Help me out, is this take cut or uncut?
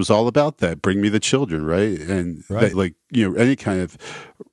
cut